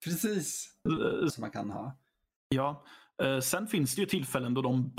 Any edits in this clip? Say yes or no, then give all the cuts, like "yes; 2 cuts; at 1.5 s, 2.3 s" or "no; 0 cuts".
yes; 1 cut; at 1.3 s